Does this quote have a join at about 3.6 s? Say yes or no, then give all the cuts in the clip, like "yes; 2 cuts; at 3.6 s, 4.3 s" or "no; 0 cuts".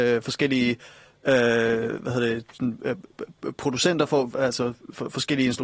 no; 0 cuts